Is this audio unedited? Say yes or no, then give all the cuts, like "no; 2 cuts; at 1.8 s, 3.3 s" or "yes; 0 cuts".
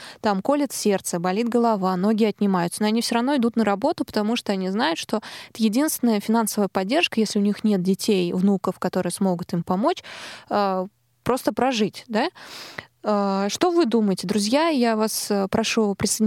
yes; 0 cuts